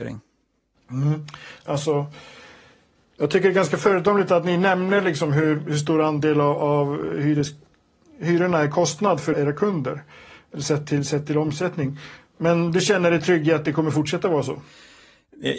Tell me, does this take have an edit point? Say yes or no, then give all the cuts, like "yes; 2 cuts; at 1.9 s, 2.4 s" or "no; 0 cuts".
yes; 2 cuts; at 1.7 s, 9.3 s